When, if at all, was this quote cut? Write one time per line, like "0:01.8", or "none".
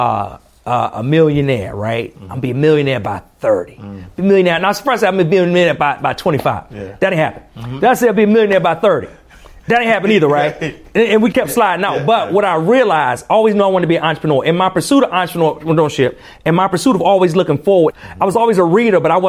0:11.3
0:17.9